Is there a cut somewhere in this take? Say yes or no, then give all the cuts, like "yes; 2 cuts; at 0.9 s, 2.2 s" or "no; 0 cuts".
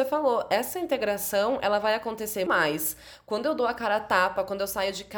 yes; 1 cut; at 2.5 s